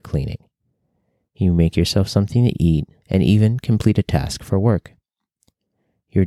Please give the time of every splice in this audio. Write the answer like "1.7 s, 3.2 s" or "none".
3.0 s